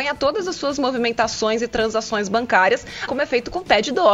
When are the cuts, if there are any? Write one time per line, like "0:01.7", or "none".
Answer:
0:03.1